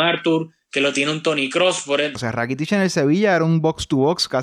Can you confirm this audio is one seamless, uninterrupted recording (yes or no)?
no